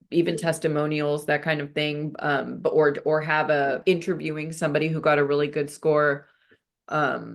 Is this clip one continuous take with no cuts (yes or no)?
no